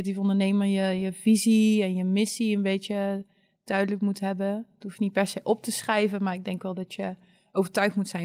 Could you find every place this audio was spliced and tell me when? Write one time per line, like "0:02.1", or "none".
none